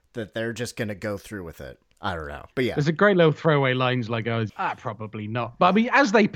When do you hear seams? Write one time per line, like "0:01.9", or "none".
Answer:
0:02.5
0:04.5